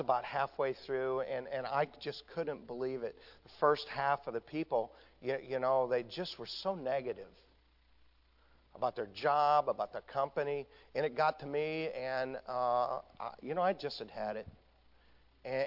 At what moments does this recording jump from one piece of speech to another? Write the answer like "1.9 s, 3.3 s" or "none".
none

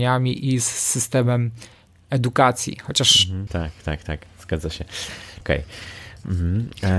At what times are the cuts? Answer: 3.5 s, 5.4 s

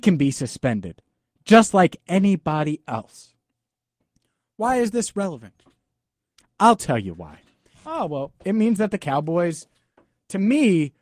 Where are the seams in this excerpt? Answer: 7.7 s

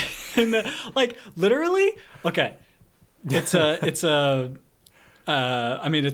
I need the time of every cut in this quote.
none

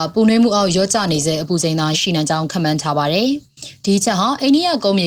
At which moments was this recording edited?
1.9 s

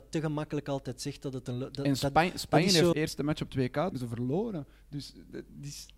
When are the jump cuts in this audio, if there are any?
2.9 s, 3.9 s

